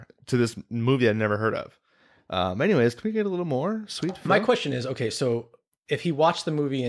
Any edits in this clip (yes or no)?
no